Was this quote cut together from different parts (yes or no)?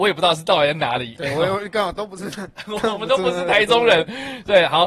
no